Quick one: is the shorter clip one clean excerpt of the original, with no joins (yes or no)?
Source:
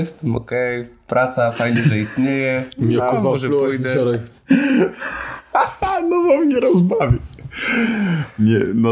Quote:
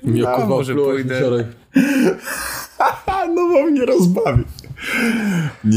yes